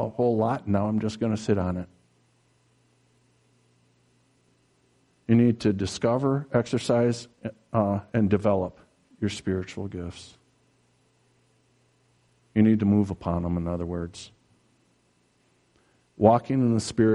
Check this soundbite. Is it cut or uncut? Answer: uncut